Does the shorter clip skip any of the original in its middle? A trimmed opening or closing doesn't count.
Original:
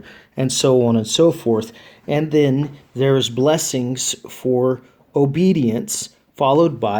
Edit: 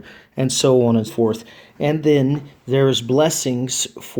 yes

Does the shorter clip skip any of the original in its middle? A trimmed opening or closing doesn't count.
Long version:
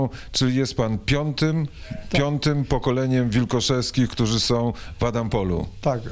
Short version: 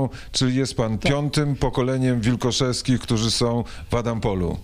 yes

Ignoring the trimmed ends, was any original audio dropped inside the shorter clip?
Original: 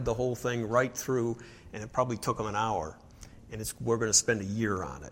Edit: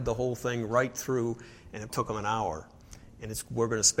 yes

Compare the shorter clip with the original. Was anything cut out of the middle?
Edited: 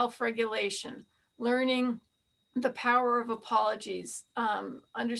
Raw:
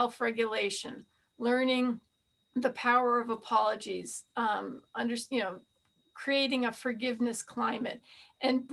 no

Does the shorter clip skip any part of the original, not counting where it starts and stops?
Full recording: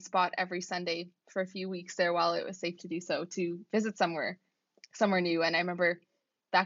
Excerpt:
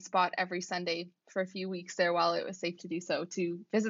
no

